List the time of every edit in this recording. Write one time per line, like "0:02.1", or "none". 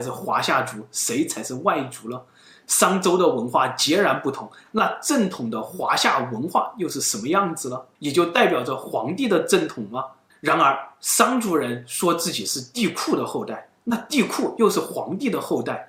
0:07.9